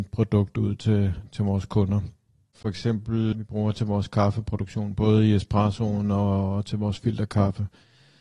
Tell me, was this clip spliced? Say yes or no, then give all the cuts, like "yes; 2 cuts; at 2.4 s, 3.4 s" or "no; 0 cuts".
yes; 1 cut; at 3.3 s